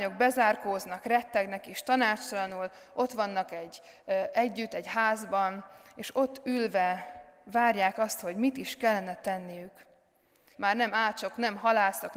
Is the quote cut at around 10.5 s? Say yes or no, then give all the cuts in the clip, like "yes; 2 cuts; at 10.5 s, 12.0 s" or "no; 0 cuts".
yes; 1 cut; at 10.5 s